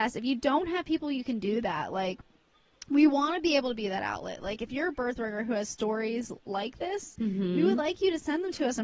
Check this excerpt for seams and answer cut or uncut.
uncut